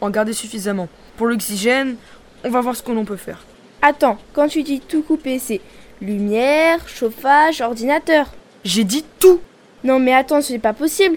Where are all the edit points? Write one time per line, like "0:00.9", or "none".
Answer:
none

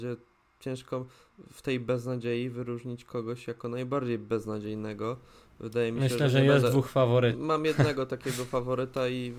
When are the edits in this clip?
0:07.3

